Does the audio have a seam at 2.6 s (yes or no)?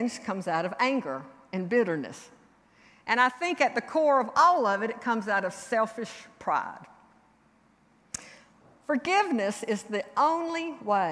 no